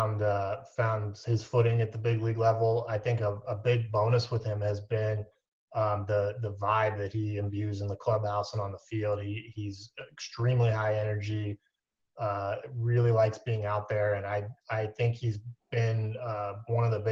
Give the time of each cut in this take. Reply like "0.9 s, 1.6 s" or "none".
none